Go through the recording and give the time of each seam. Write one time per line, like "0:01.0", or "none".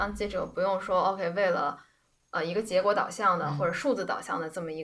none